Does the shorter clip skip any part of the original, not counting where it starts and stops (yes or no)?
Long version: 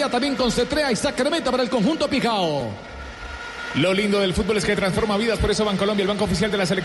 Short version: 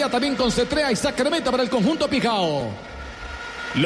no